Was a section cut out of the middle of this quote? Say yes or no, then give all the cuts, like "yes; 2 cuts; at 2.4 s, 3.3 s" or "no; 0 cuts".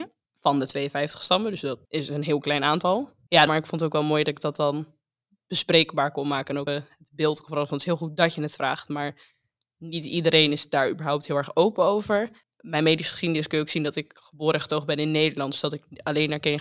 yes; 2 cuts; at 3.5 s, 6.7 s